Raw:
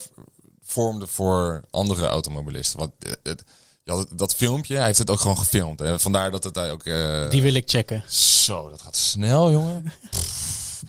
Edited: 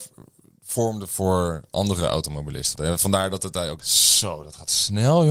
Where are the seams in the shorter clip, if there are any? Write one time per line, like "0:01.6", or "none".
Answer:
0:02.8
0:03.8